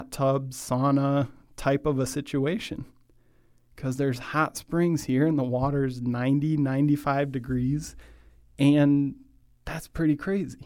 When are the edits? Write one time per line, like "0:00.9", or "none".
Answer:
none